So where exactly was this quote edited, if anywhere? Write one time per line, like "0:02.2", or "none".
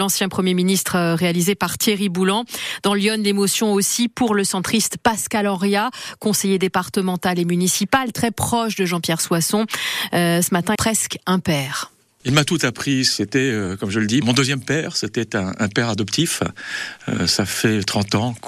0:10.8
0:14.2